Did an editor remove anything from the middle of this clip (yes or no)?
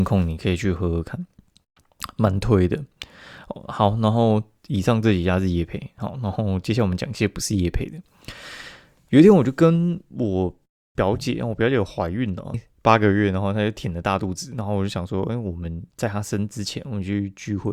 yes